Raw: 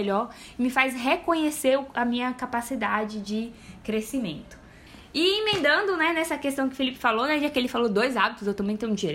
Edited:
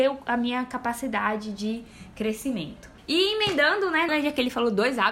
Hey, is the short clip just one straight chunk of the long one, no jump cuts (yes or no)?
no